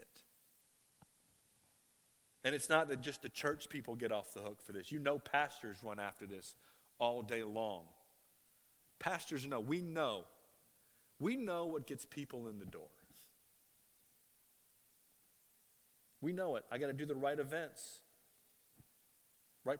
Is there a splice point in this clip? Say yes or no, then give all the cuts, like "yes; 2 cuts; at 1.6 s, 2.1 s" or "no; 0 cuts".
no; 0 cuts